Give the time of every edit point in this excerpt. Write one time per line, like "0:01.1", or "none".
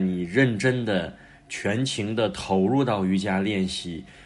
none